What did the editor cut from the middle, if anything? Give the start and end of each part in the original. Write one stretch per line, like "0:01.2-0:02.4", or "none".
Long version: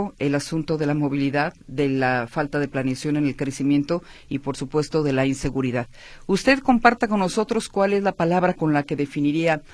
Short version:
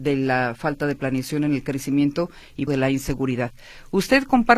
0:04.4-0:05.0